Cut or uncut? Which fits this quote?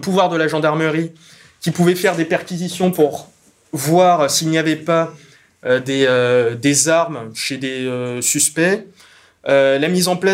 uncut